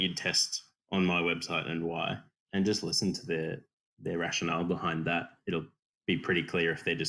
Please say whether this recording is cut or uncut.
uncut